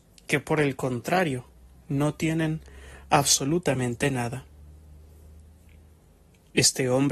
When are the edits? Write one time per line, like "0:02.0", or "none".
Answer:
none